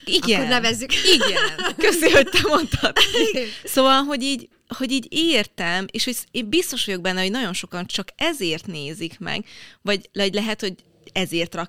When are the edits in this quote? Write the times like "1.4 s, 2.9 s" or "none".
3.3 s